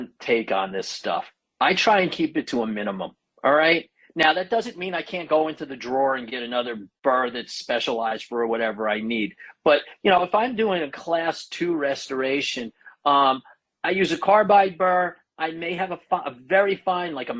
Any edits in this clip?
no; 0 cuts

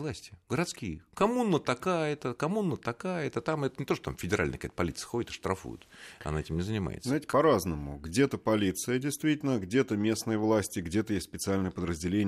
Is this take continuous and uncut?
yes; 0 cuts

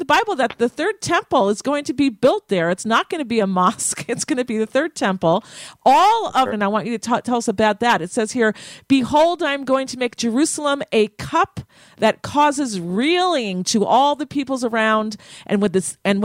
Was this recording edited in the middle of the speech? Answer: yes; 1 cut; at 6.5 s

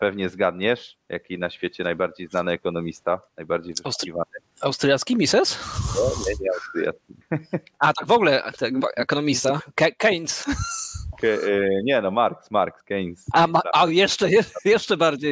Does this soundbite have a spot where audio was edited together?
no; 0 cuts

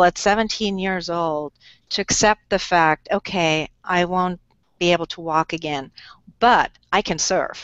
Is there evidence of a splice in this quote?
no; 0 cuts

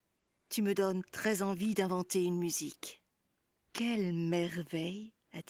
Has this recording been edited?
yes; 1 cut; at 3.5 s

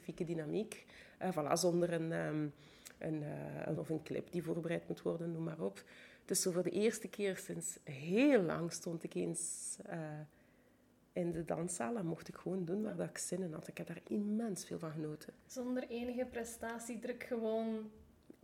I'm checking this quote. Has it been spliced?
yes; 1 cut; at 3.8 s

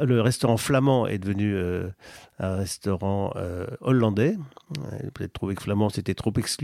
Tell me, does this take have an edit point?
no; 0 cuts

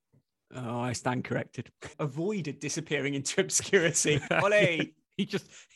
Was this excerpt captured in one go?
no; 2 cuts; at 1.9 s, 4.3 s

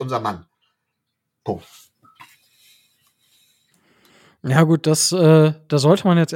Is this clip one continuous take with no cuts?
yes; 0 cuts

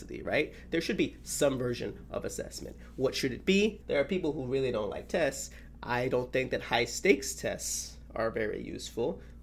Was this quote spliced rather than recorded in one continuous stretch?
yes; 1 cut; at 3.8 s

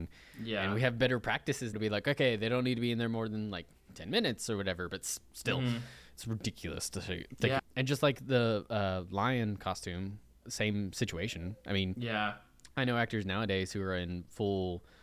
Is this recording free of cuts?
no; 3 cuts; at 1.7 s, 7.6 s, 10.4 s

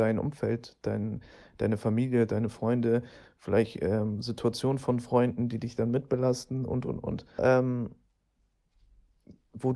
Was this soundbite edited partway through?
yes; 1 cut; at 7.4 s

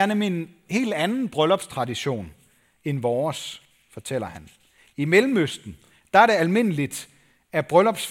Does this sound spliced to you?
no; 0 cuts

